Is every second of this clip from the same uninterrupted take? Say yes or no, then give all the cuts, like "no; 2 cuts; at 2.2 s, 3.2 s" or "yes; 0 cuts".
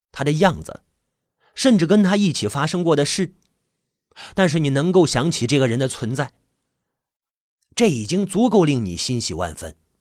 yes; 0 cuts